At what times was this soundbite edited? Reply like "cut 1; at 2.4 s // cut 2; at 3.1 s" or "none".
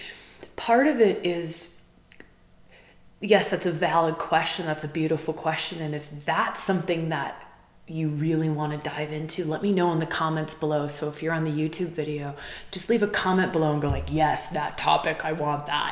none